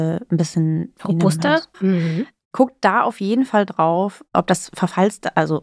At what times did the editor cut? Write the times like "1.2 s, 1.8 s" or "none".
1.7 s